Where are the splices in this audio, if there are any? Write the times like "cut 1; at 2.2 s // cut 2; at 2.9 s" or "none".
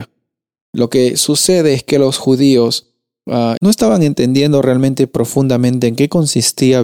cut 1; at 3.6 s